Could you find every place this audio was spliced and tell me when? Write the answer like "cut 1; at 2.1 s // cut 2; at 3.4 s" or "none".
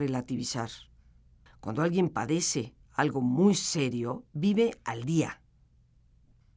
cut 1; at 1.5 s // cut 2; at 2.8 s // cut 3; at 4.3 s